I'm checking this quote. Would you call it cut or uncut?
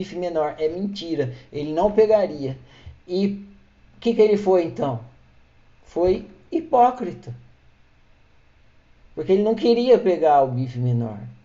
cut